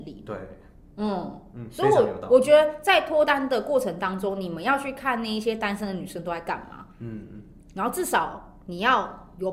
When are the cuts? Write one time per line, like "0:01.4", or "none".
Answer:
none